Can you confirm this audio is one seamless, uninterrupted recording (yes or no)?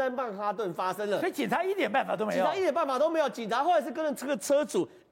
yes